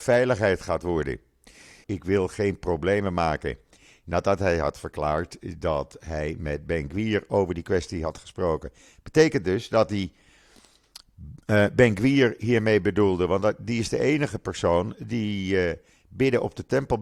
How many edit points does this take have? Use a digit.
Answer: 1